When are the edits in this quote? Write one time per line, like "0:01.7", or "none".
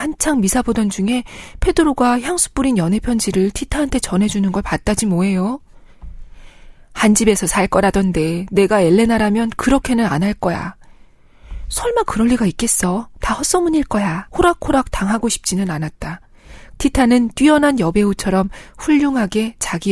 0:14.3
0:16.8

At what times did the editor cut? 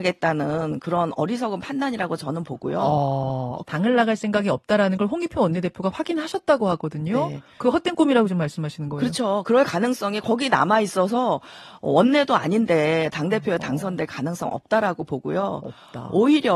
0:03.6

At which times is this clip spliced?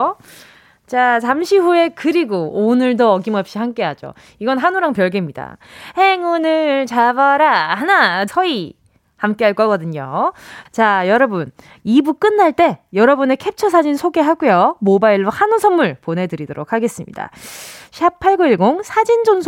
0:08.3
0:10.7

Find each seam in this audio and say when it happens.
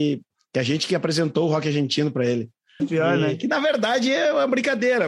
0:02.8

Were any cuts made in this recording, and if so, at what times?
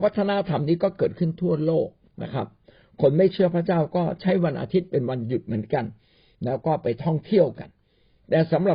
none

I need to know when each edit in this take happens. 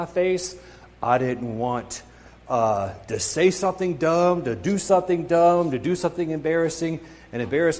none

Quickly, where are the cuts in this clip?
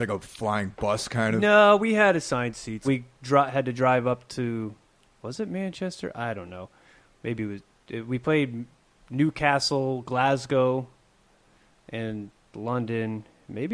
0:02.8

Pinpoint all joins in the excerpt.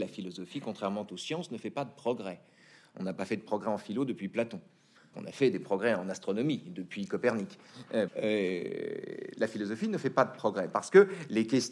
0:05.1
0:08.1

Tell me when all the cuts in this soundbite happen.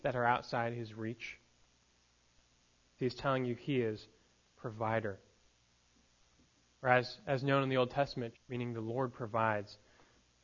0:03.0
0:08.3

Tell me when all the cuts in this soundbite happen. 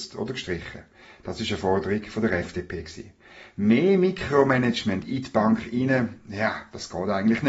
none

